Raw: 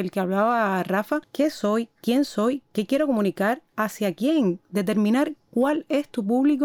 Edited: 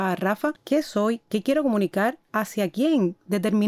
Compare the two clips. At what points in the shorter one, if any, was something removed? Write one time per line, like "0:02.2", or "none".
0:01.2